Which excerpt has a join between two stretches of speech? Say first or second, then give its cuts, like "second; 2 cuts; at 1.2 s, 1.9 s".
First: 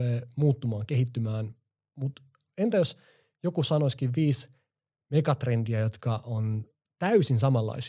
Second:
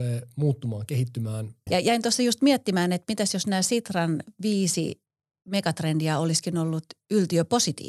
second; 1 cut; at 1.7 s